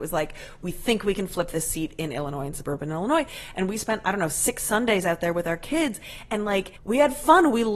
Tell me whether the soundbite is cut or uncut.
cut